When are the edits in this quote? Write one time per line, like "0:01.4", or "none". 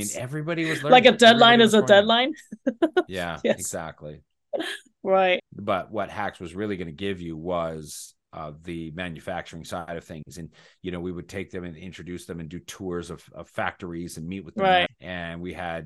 0:05.4
0:14.9